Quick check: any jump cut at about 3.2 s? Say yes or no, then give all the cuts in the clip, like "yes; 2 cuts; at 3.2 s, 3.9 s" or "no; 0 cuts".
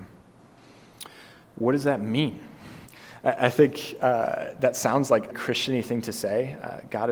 no; 1 cut; at 5.3 s